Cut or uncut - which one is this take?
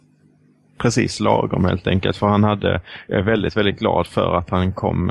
uncut